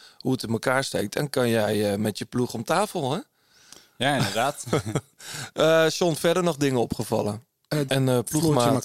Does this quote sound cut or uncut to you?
cut